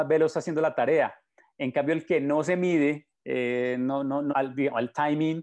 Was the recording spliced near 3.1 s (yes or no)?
yes